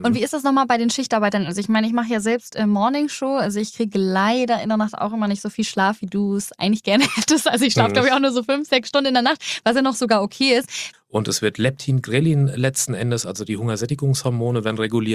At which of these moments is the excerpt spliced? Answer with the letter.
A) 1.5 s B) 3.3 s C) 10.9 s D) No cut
C